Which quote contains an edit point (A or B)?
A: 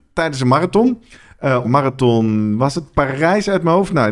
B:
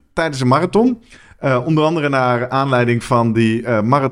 A